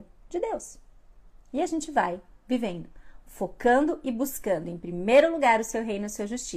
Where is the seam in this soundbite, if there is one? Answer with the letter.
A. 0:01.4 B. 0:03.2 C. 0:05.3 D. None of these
D